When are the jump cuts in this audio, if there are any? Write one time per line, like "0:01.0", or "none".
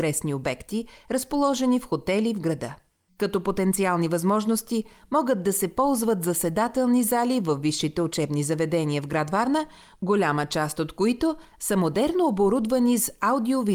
0:03.1